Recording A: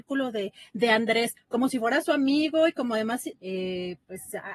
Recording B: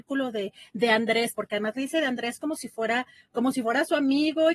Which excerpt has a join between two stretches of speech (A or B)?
A